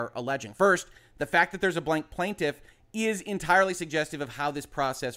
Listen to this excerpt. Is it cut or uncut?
uncut